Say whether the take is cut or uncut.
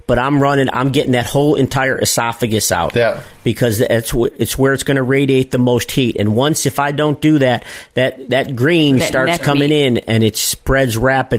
uncut